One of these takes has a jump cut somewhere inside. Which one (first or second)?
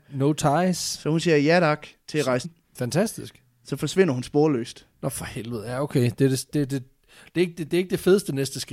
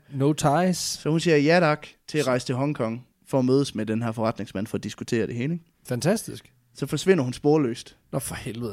first